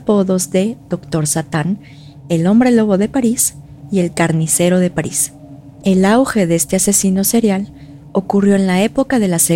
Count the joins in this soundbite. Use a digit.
1